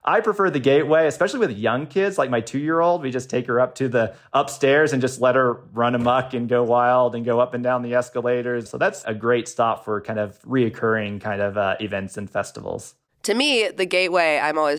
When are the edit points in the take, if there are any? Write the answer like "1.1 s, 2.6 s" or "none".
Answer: 8.7 s